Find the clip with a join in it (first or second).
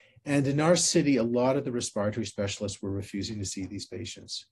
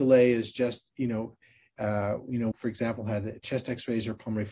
second